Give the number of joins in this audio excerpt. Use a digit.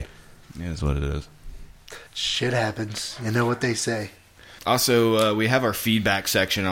1